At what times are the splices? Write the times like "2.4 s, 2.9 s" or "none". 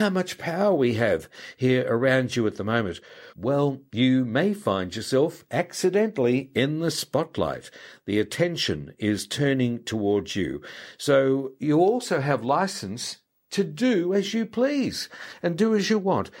3.3 s